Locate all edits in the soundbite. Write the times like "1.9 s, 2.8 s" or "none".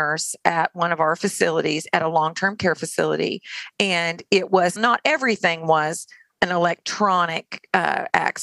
3.7 s, 4.8 s